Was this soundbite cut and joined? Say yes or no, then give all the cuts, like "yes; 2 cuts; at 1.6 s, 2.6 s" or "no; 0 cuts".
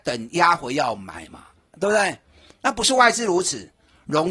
yes; 1 cut; at 2.5 s